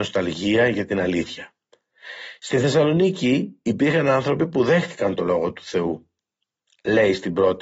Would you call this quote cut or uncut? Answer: uncut